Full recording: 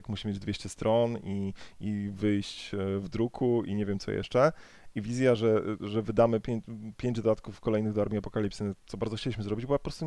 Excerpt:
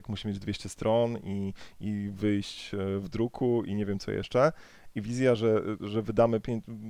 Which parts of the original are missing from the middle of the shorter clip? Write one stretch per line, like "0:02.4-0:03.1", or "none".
none